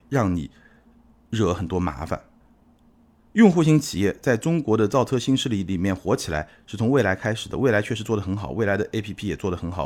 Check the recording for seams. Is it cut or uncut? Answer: uncut